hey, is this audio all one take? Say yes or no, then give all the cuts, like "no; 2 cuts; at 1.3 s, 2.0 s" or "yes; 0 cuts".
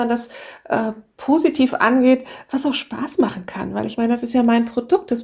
yes; 0 cuts